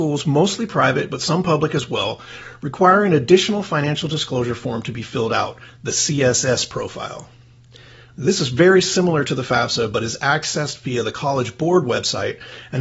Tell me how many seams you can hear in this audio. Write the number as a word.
zero